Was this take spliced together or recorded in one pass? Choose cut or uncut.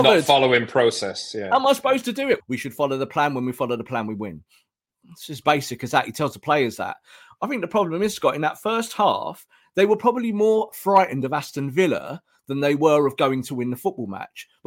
cut